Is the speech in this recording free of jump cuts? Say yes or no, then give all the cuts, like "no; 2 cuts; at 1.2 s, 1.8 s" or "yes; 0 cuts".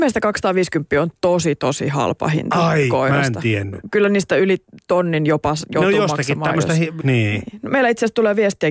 no; 1 cut; at 7.0 s